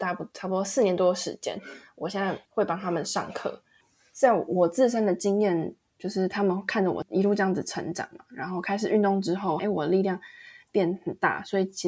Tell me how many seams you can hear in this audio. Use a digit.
1